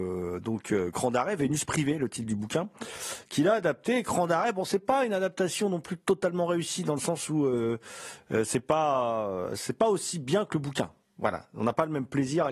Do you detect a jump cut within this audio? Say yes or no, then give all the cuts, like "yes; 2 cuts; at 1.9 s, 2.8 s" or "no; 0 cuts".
no; 0 cuts